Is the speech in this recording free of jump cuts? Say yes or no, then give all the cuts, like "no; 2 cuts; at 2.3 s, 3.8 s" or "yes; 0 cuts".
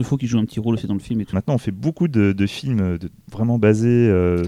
no; 1 cut; at 1.3 s